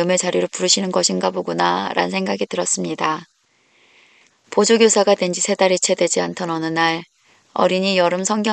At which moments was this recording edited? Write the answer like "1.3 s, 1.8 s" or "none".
4.3 s